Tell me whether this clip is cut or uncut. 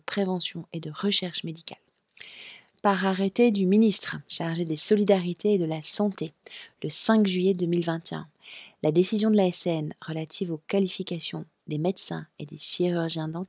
cut